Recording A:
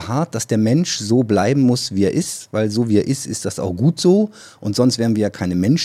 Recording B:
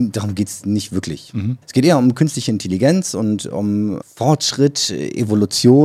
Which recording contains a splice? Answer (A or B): B